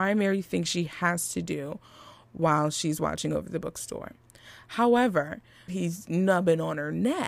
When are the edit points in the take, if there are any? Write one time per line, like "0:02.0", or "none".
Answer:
0:05.7

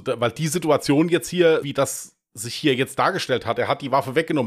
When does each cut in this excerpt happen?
0:01.6

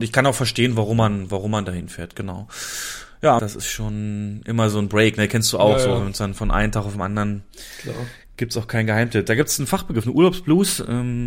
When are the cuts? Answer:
0:03.4

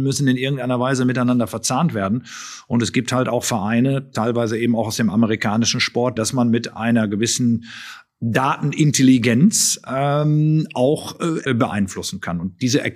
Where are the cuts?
0:06.2
0:11.5

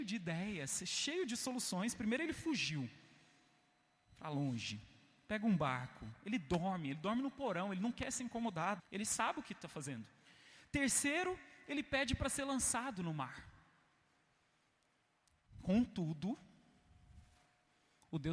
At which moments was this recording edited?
0:08.8

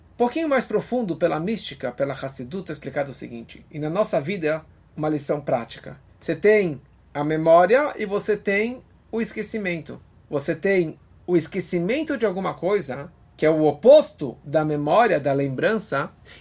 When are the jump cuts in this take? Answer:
0:11.2

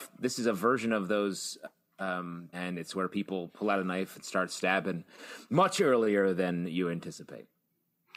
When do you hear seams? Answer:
0:02.5

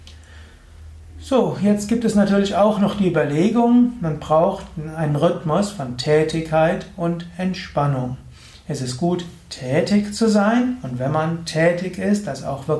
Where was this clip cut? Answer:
none

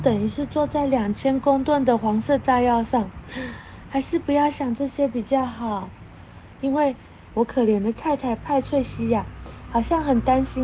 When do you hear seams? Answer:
0:07.3

